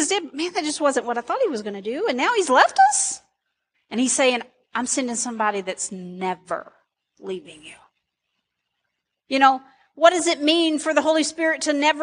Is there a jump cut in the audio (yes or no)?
yes